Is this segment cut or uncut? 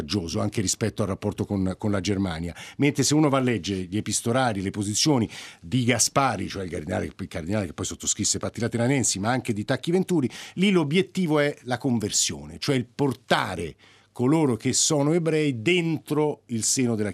uncut